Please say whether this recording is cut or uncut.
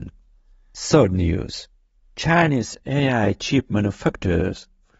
uncut